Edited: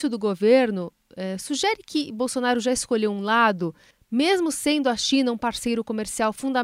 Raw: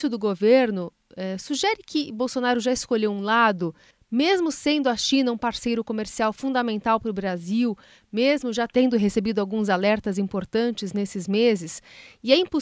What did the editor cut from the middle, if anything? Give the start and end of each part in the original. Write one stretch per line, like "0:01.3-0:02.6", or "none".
none